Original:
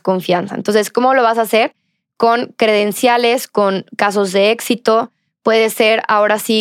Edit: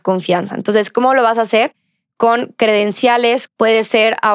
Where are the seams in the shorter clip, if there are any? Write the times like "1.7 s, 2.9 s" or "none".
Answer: 3.5 s

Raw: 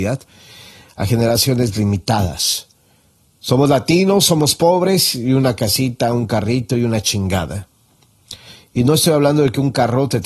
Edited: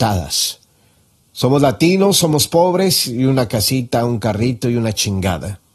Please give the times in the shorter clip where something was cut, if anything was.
none

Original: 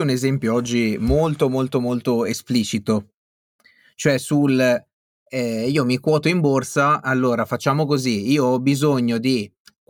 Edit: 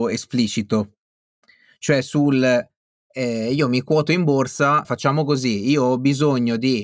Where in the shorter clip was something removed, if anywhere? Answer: 4.8 s

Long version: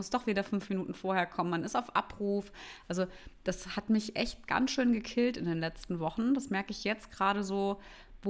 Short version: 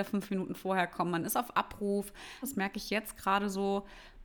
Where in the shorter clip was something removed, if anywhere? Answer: 2.4 s

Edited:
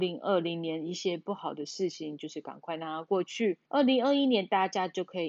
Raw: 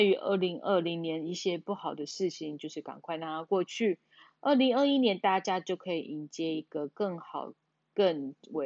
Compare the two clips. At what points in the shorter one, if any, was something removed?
3.6 s

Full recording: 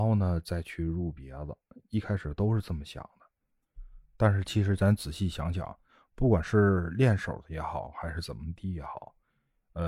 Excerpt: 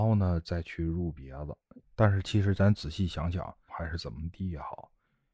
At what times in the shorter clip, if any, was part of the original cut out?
1.8 s, 3.7 s

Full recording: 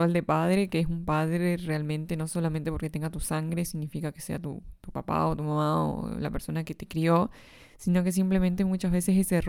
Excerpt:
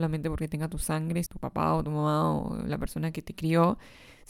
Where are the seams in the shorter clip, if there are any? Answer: 1.3 s

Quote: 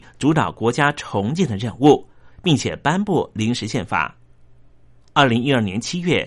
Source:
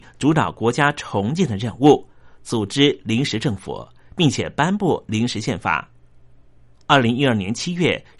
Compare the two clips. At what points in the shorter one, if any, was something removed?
2.3 s

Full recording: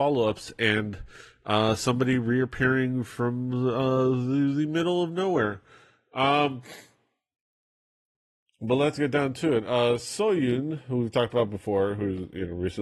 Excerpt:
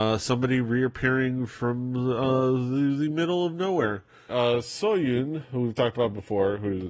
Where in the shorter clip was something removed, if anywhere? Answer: 4.3 s

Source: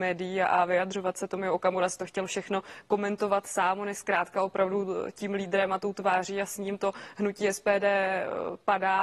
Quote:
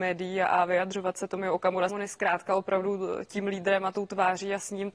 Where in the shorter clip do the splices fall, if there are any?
1.9 s

